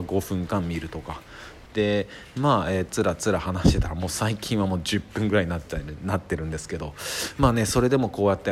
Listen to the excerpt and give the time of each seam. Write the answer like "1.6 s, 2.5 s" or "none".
1.7 s, 2.9 s